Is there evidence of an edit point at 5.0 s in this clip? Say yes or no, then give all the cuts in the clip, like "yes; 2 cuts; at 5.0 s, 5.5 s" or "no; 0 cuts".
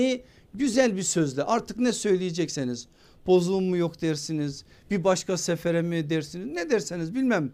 no; 0 cuts